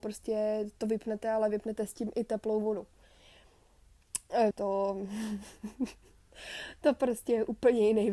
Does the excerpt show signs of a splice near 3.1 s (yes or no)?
no